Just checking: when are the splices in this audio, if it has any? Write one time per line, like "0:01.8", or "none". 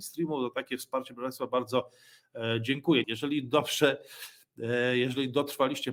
0:03.0